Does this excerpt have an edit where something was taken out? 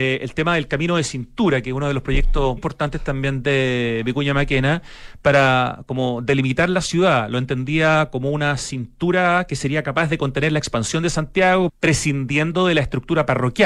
yes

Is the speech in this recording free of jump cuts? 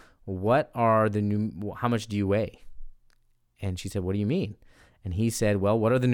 yes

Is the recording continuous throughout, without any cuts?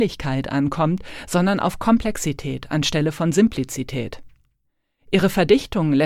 yes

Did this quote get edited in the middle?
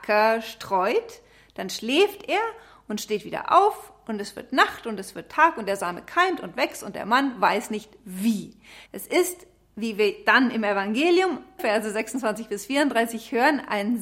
yes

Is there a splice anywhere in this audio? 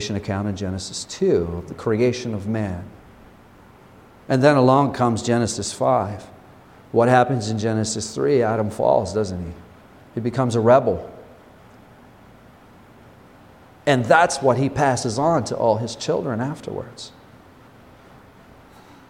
yes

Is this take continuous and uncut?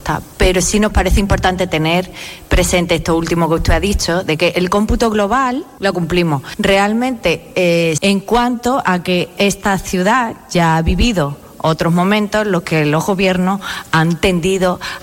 no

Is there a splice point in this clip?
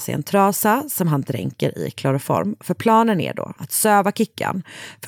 yes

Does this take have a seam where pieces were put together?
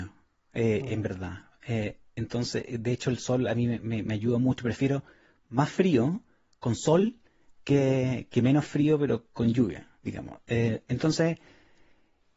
yes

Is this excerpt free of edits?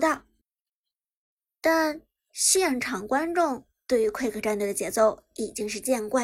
yes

